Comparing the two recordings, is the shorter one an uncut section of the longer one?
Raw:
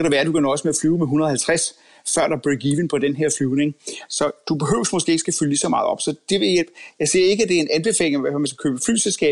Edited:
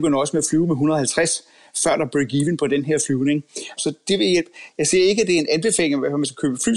no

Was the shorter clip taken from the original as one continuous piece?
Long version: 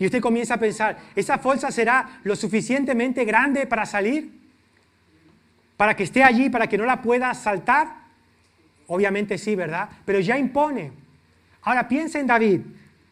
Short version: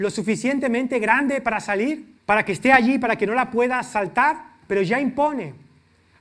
no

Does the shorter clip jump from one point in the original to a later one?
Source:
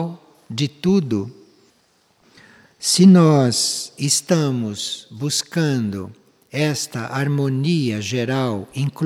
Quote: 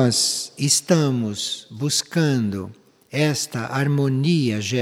no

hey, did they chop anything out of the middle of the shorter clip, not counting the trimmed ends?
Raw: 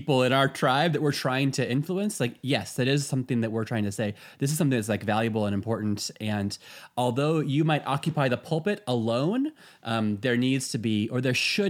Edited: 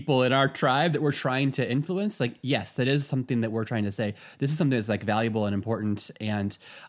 no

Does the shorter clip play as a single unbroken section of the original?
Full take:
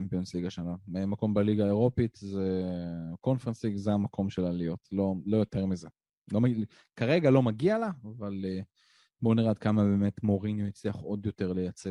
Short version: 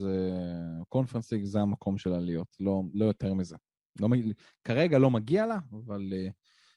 yes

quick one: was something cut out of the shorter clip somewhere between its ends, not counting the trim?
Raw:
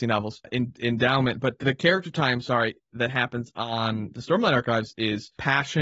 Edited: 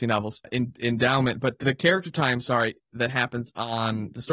no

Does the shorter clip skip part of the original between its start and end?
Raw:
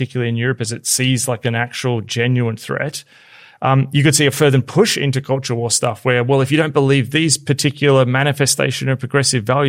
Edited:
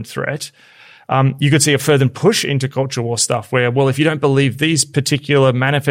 no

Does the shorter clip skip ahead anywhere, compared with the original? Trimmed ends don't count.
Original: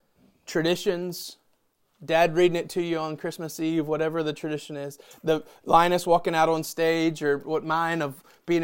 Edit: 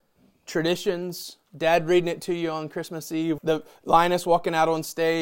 yes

